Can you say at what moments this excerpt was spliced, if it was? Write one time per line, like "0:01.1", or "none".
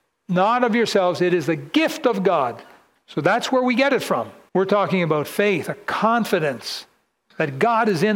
0:04.5

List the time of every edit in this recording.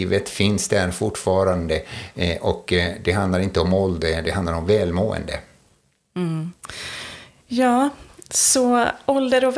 none

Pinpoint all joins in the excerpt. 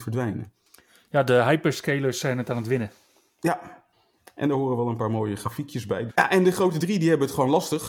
0:06.1

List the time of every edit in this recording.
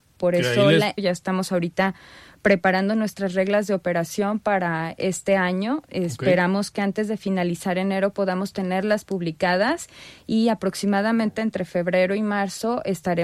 0:01.0

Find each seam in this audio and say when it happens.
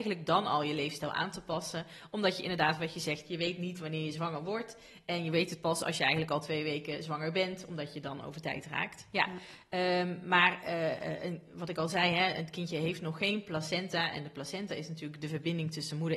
none

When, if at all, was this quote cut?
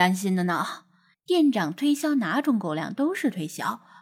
0:01.1

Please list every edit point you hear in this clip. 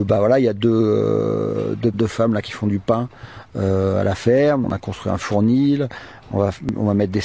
0:01.9
0:04.6

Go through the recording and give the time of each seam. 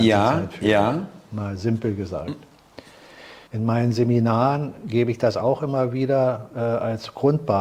0:03.5

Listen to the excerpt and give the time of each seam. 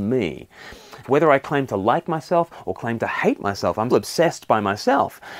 0:01.0
0:03.9

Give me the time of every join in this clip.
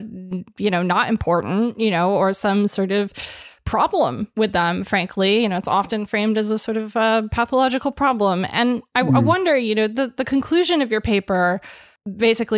none

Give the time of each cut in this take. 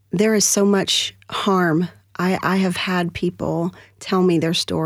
none

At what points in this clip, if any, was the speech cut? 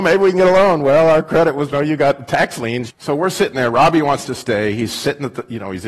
0:01.7
0:02.9

